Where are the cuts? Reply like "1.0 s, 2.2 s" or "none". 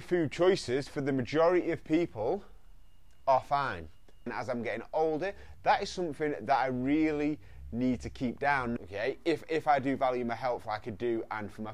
4.3 s, 8.8 s